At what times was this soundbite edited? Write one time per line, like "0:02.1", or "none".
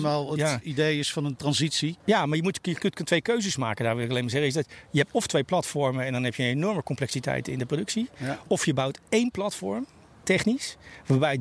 0:02.0